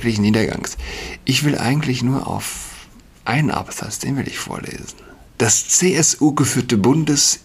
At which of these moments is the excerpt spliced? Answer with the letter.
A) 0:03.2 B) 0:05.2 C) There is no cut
B